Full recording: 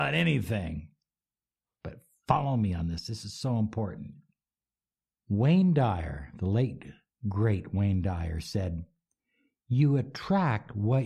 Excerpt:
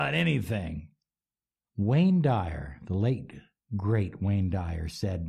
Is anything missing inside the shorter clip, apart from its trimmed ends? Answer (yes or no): yes